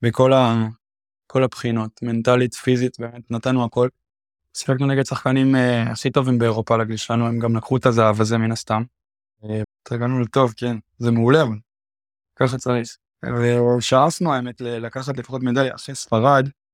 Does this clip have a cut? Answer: yes; 1 cut; at 9.6 s

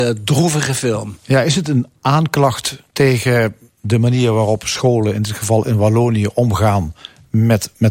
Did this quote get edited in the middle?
no; 0 cuts

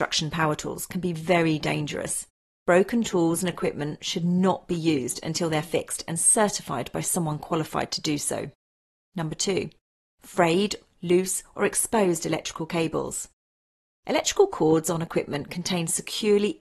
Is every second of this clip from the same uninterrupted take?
yes; 0 cuts

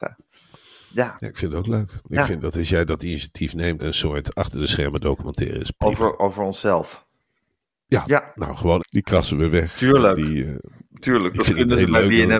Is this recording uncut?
no; 2 cuts; at 3.8 s, 8.8 s

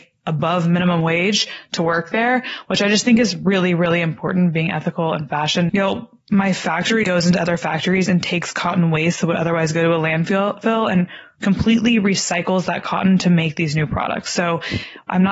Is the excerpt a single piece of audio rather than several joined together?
no; 2 cuts; at 5.7 s, 7.0 s

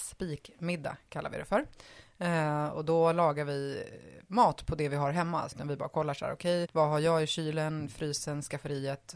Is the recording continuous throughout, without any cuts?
no; 2 cuts; at 5.5 s, 6.7 s

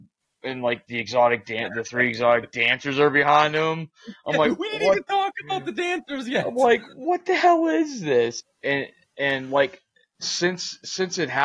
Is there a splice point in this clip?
yes; 1 cut; at 8.4 s

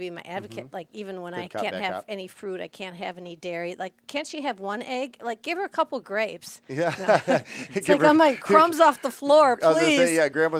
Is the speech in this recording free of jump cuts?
yes; 0 cuts

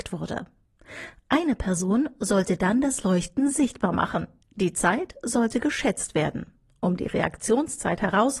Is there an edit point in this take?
yes; 1 cut; at 4.4 s

